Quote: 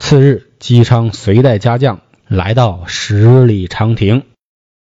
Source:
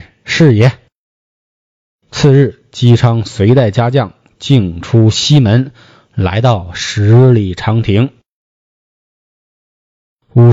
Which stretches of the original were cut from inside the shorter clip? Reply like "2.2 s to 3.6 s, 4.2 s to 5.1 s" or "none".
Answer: 4.3 s to 6.1 s